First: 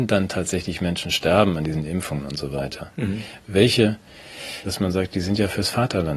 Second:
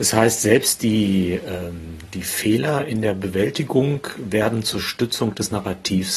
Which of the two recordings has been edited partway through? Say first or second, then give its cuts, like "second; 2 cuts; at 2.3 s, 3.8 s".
first; 1 cut; at 4.7 s